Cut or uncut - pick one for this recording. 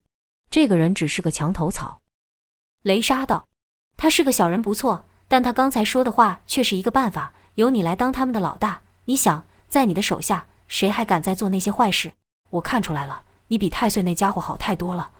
cut